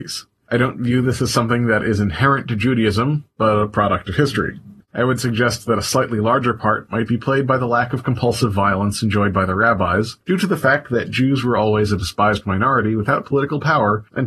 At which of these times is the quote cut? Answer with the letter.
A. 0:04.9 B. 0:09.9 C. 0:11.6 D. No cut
A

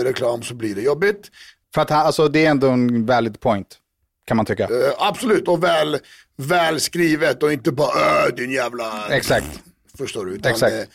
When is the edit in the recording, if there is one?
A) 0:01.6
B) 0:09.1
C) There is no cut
A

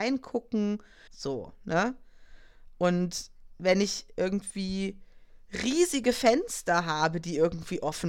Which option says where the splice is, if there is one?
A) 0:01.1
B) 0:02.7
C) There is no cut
A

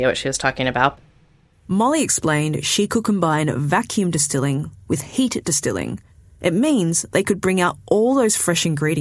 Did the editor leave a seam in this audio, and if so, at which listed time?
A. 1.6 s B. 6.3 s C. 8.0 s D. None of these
B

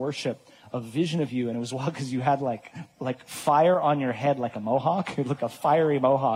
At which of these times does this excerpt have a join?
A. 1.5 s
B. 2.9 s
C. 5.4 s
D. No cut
C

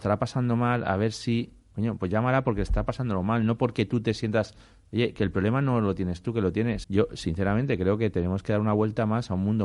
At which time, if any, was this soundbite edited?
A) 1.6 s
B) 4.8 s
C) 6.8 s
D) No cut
C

